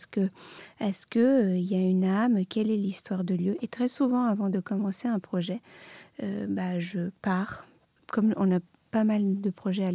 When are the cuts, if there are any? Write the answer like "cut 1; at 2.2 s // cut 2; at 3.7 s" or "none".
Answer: none